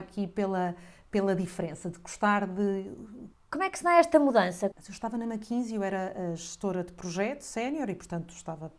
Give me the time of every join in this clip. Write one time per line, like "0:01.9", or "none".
0:03.3
0:04.7